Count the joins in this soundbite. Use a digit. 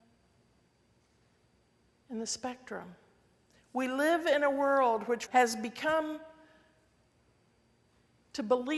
1